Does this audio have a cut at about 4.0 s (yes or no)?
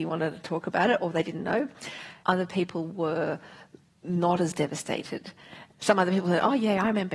no